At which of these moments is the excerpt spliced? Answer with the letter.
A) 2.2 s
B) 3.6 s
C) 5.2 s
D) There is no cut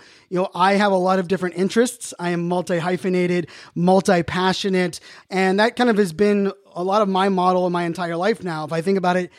C